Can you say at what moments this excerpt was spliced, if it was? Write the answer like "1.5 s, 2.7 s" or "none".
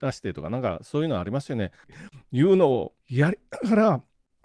1.8 s, 3.0 s